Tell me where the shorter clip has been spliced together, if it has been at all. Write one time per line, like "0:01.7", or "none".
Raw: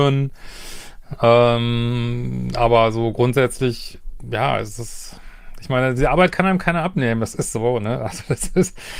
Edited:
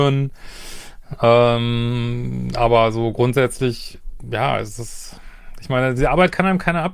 none